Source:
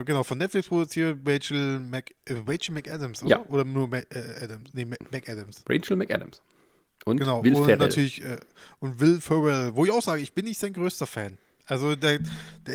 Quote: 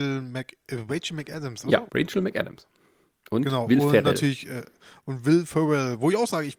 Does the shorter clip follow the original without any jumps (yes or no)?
no